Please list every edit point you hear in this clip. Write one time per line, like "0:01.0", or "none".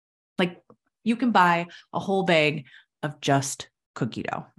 0:01.0